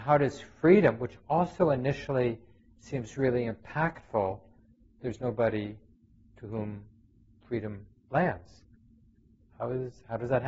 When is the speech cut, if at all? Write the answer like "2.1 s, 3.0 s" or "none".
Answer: 5.0 s